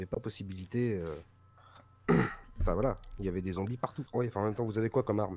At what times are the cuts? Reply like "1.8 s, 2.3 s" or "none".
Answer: 4.1 s